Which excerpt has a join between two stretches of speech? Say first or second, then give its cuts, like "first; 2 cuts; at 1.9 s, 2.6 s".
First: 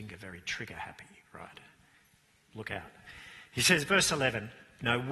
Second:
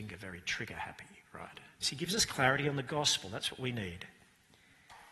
second; 1 cut; at 1.8 s